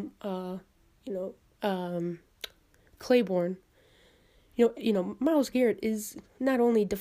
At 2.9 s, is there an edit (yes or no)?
no